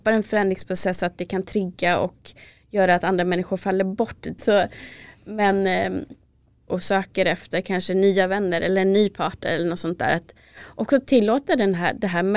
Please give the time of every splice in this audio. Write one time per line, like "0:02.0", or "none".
0:04.4
0:06.7